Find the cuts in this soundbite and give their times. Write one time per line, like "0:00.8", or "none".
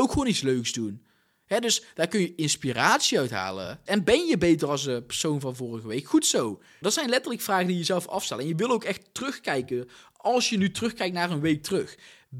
0:03.9
0:06.8